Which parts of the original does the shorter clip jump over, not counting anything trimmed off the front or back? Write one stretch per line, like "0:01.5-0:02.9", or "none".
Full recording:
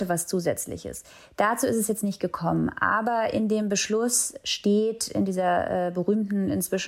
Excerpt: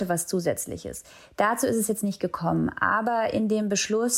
none